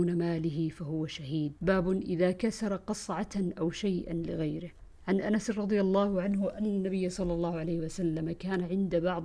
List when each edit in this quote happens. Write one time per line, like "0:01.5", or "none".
0:01.6